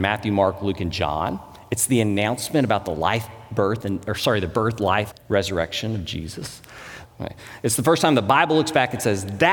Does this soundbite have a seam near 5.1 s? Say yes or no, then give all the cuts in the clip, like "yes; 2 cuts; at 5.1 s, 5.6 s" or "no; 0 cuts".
yes; 2 cuts; at 5.1 s, 7.0 s